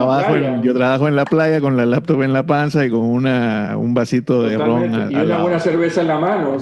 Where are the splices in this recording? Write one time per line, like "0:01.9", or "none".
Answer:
none